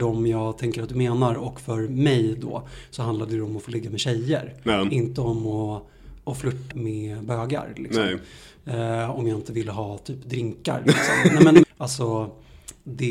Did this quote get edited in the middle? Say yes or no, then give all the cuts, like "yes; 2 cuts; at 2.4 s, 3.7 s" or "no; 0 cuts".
yes; 2 cuts; at 6.7 s, 11.6 s